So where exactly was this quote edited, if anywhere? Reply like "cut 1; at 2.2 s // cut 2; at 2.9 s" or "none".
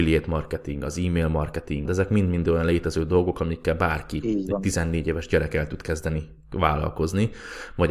cut 1; at 1.9 s

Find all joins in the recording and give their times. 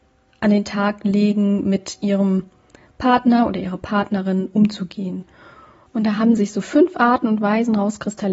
none

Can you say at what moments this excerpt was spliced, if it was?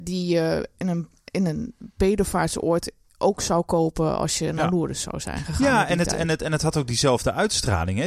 none

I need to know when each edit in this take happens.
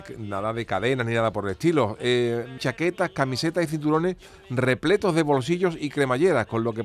cut 1; at 2.6 s

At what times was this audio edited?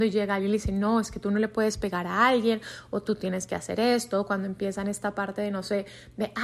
none

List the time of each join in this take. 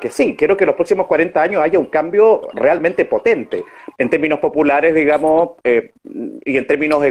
cut 1; at 3.9 s

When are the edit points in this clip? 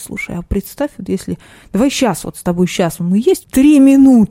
cut 1; at 3.4 s

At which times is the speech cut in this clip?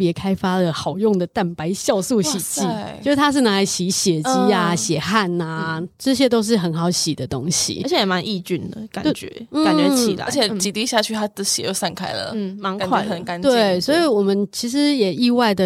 none

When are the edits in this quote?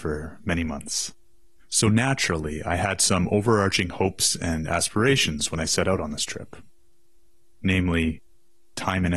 cut 1; at 1.6 s

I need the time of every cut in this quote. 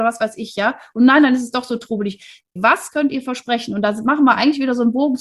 cut 1; at 2.6 s

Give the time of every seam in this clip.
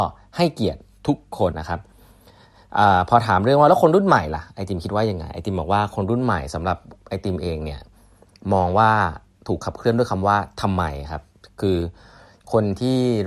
cut 1; at 1.5 s

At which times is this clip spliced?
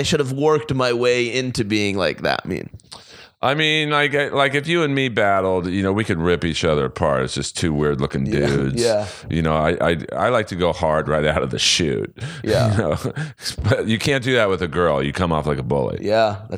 none

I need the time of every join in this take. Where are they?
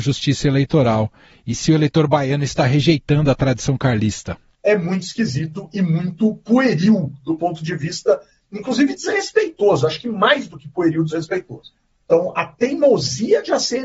cut 1; at 4.5 s // cut 2; at 12.0 s

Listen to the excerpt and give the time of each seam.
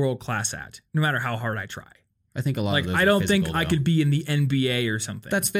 none

